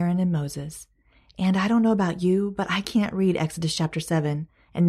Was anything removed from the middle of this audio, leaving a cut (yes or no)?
no